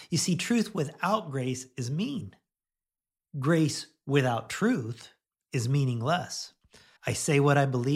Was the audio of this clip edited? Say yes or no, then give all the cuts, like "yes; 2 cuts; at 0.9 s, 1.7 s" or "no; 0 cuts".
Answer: yes; 1 cut; at 7.0 s